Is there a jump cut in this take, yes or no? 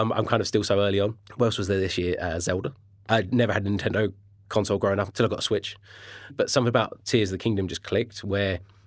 yes